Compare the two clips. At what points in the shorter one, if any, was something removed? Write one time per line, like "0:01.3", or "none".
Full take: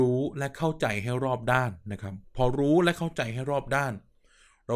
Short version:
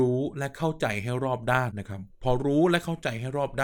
0:01.7